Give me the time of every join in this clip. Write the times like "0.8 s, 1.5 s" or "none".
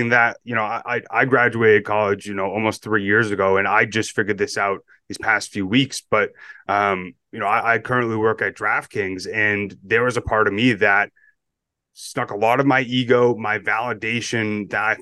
none